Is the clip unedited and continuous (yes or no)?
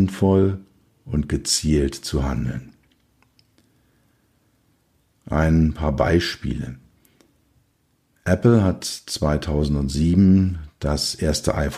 yes